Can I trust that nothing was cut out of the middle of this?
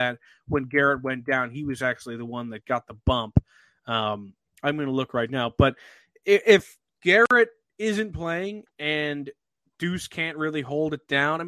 yes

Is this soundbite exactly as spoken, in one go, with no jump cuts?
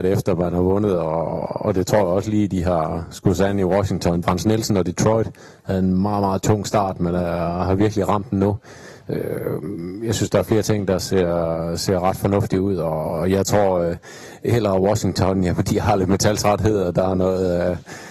no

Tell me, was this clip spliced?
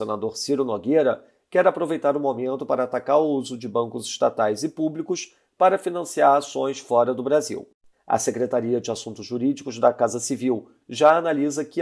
yes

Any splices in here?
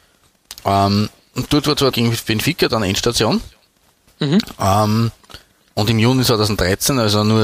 yes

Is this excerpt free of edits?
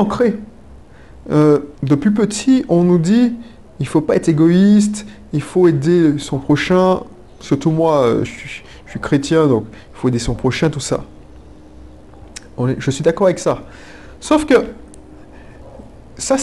no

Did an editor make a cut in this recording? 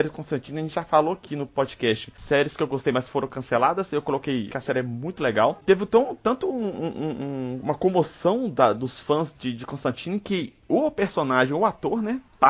yes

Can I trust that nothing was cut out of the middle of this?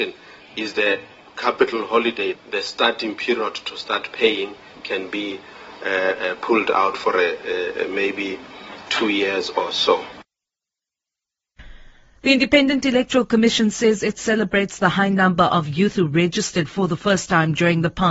yes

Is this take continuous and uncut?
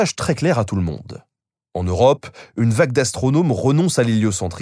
yes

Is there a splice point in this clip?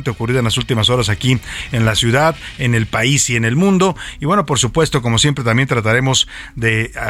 no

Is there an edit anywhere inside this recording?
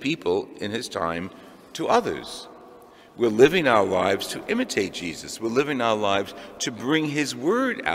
no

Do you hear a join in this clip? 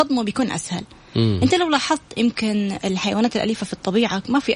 yes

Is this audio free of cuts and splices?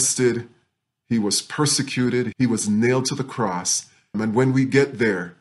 no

